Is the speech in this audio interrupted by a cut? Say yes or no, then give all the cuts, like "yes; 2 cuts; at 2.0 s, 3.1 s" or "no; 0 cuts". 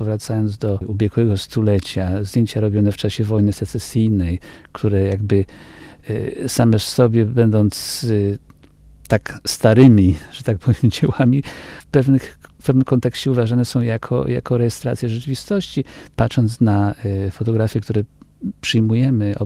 yes; 1 cut; at 16.1 s